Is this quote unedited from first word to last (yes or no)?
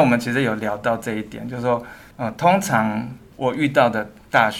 no